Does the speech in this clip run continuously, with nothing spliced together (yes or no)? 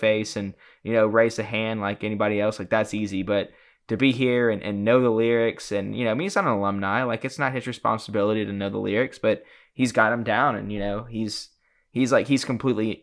yes